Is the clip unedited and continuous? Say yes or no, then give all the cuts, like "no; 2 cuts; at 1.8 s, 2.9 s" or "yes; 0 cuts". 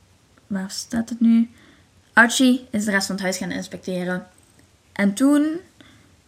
no; 1 cut; at 4.7 s